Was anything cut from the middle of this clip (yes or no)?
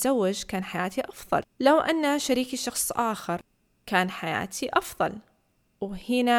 yes